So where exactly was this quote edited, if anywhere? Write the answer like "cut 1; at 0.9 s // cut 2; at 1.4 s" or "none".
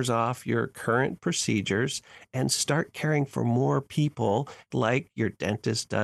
cut 1; at 4.7 s